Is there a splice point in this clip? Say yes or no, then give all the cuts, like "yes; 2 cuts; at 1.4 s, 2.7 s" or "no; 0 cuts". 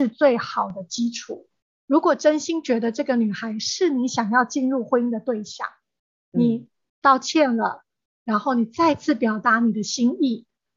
yes; 1 cut; at 1.8 s